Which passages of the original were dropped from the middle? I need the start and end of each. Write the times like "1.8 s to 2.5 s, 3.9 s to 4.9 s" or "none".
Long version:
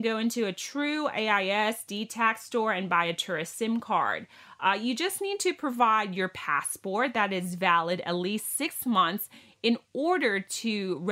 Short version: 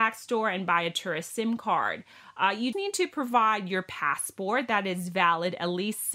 5.0 s to 5.2 s